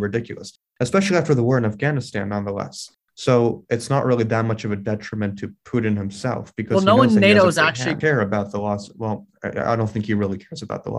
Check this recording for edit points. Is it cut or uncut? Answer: cut